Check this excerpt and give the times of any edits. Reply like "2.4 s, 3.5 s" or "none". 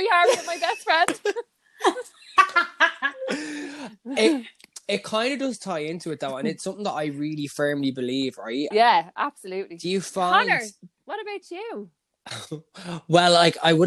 8.7 s